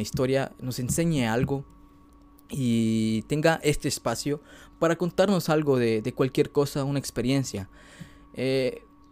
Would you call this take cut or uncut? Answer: uncut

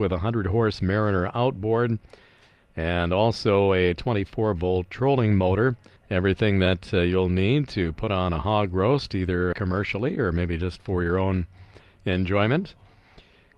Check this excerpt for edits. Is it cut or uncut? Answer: cut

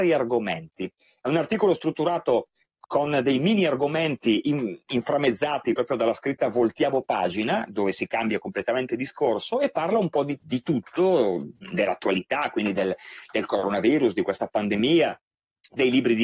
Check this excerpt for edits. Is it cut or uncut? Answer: cut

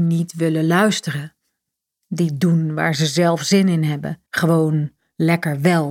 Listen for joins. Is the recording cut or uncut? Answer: cut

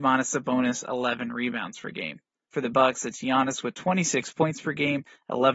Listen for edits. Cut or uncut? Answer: cut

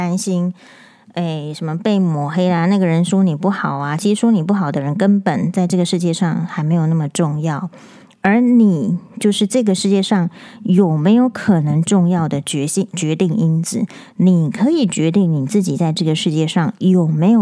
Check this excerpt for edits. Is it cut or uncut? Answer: uncut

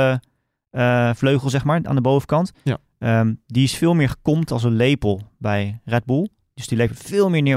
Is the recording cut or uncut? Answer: uncut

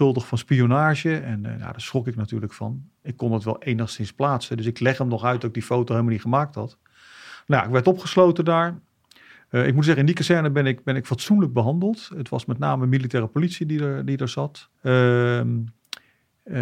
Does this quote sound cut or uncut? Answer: cut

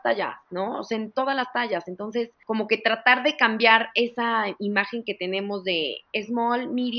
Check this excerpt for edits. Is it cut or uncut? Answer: uncut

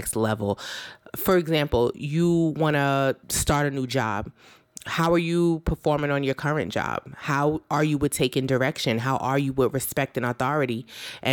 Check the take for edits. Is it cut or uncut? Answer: cut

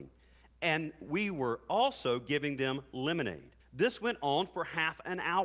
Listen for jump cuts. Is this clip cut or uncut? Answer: cut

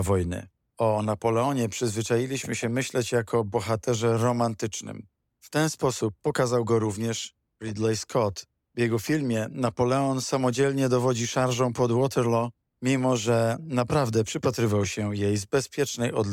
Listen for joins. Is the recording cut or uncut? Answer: uncut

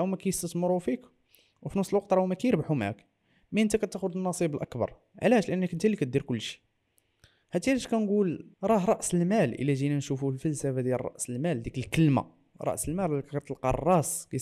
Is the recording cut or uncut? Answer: cut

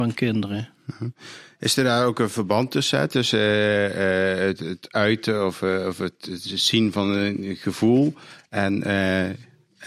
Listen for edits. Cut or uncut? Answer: uncut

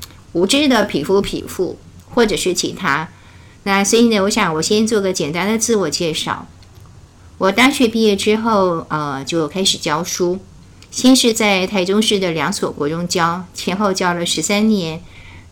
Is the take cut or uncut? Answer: uncut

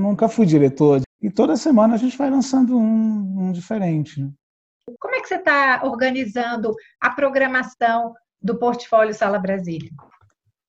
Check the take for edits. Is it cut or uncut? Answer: cut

